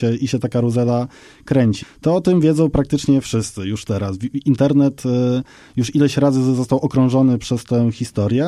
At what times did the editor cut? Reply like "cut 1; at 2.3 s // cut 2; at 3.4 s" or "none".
cut 1; at 1.8 s